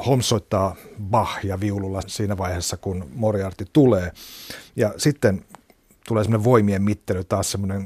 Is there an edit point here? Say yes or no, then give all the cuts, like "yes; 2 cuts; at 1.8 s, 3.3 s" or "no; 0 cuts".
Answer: yes; 1 cut; at 2.0 s